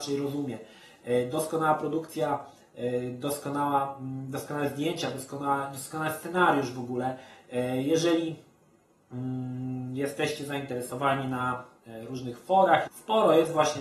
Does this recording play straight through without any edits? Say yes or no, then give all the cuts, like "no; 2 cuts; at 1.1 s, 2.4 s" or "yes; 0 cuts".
no; 1 cut; at 12.9 s